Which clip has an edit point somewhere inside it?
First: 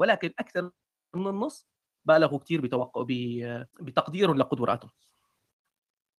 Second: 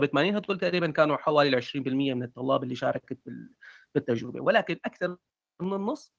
first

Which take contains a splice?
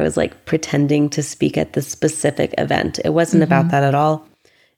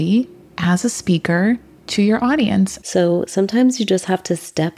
second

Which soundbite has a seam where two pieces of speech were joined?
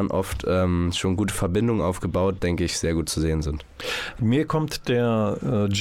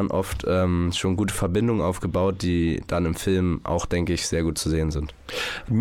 first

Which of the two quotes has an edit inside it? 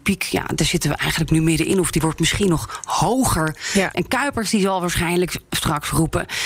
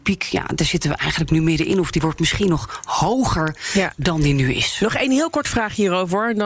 first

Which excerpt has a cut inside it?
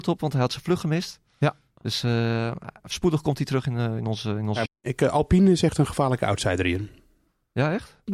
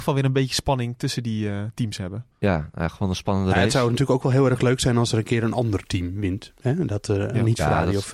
first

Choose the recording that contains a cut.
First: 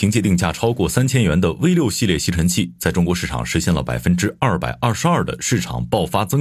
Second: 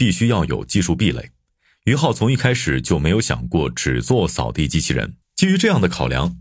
second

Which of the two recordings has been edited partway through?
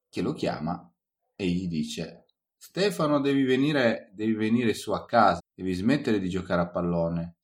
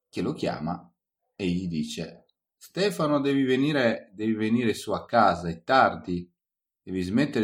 first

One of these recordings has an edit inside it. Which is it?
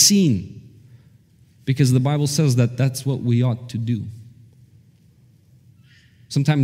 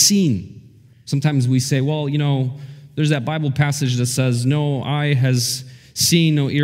second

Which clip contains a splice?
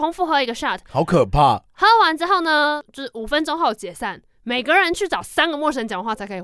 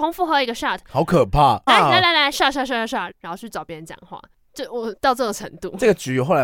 second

